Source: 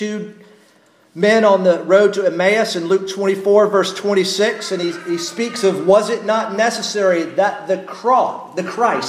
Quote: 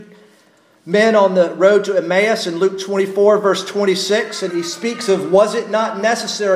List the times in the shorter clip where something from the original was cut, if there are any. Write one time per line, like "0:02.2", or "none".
0:04.5